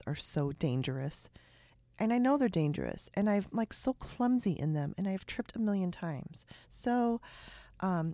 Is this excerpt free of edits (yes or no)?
yes